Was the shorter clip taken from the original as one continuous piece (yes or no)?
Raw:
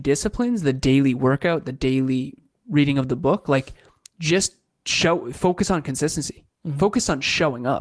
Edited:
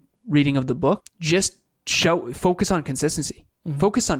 no